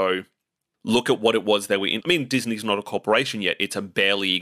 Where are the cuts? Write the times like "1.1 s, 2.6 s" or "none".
2.0 s